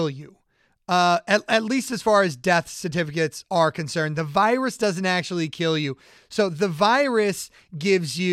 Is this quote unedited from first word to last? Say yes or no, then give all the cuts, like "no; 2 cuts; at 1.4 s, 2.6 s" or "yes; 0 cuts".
yes; 0 cuts